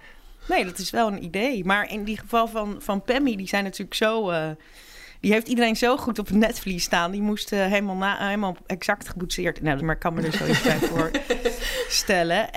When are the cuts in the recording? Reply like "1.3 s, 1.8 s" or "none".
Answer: 9.8 s